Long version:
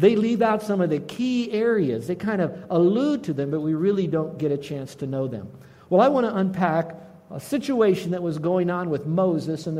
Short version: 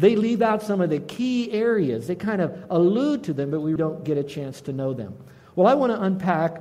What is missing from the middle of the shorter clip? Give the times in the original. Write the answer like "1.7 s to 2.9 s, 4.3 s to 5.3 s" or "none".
3.8 s to 4.1 s